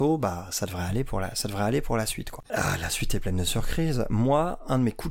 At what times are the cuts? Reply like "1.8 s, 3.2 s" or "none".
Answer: 2.4 s

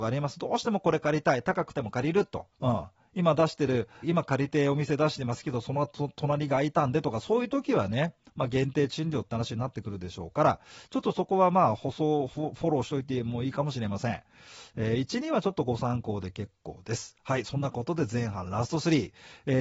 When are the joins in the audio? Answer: 2.5 s, 4.0 s

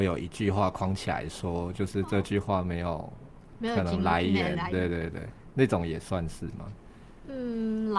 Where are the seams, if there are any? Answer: 4.7 s

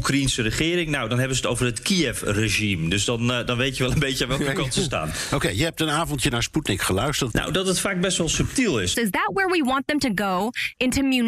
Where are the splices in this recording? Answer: 7.3 s, 8.9 s

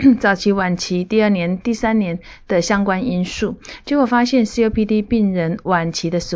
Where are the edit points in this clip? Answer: none

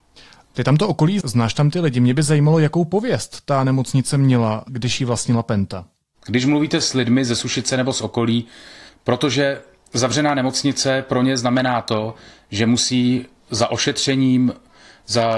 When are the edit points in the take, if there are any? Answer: 1.2 s, 8.9 s

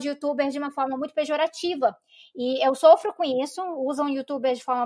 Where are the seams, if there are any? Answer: none

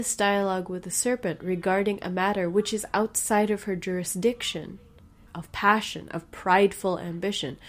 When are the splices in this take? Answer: 5.3 s

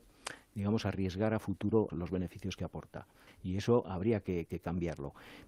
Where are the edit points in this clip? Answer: 1.9 s, 3.3 s, 4.5 s

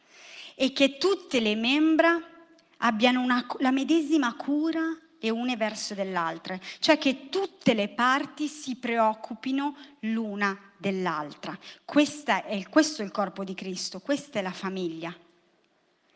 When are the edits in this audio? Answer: none

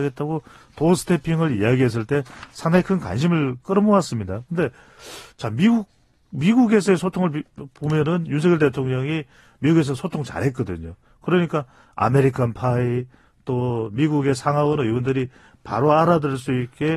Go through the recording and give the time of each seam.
none

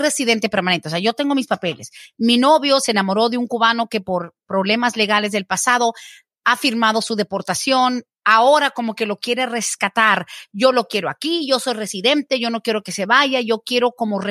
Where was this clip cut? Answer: none

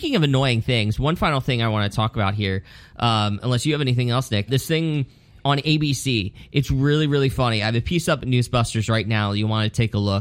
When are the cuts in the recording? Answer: 4.5 s

